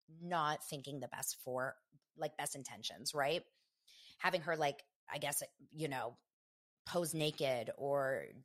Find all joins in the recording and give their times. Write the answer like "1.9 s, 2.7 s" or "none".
none